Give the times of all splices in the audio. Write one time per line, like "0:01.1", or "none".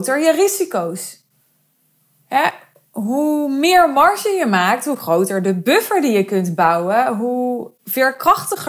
none